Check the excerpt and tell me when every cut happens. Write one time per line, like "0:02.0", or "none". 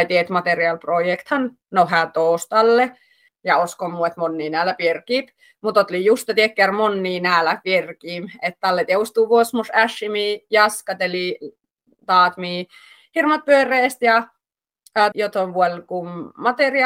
0:03.3
0:15.1